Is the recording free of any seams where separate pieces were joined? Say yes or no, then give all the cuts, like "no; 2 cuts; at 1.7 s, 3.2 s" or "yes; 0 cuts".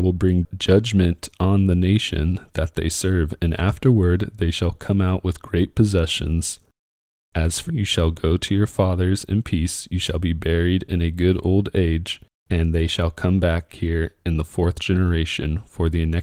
no; 1 cut; at 7.7 s